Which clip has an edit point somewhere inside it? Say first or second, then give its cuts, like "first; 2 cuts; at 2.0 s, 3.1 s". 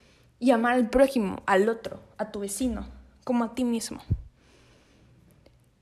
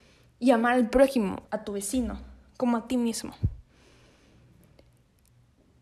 second; 1 cut; at 1.4 s